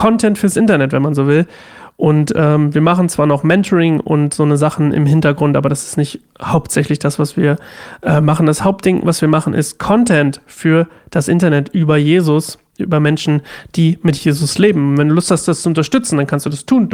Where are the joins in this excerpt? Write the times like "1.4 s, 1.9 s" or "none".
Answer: none